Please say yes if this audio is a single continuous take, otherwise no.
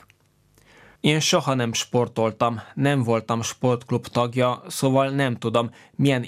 no